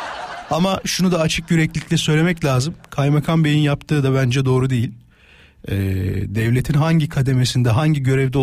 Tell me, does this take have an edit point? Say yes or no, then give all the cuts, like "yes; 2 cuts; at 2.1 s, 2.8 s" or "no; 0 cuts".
no; 0 cuts